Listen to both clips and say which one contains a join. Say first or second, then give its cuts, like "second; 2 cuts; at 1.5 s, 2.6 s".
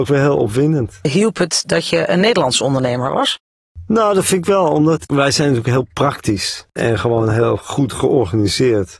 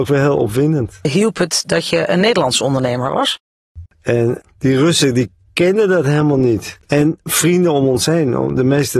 second; 2 cuts; at 3.9 s, 6.8 s